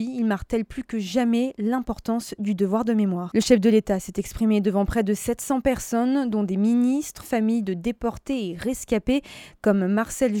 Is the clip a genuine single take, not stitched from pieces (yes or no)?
no